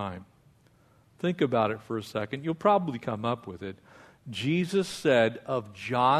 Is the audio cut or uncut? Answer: uncut